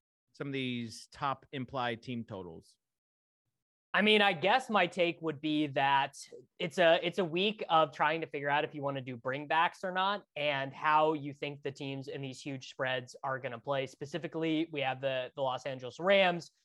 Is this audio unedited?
yes; 0 cuts

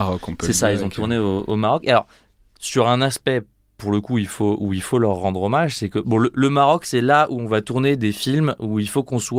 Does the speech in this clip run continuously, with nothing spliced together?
yes; 0 cuts

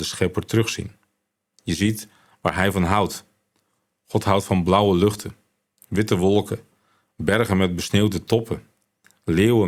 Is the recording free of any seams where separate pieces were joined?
yes; 0 cuts

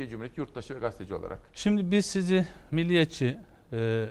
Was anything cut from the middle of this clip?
yes; 1 cut; at 1.5 s

